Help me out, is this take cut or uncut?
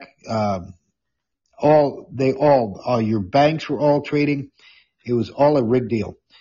uncut